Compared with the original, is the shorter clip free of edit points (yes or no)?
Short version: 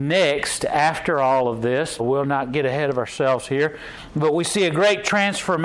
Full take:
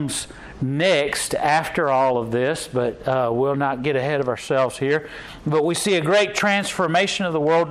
no